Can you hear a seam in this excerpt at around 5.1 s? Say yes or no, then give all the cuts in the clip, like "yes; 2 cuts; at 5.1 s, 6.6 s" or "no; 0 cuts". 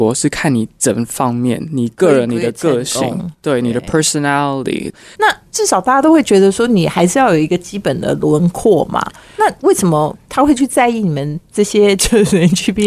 yes; 1 cut; at 5.1 s